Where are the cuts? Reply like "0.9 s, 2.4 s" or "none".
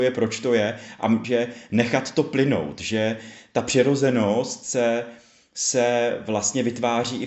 1.2 s